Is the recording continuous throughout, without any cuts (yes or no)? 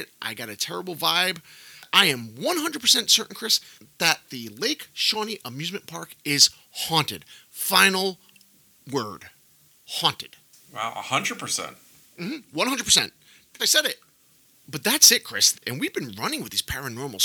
no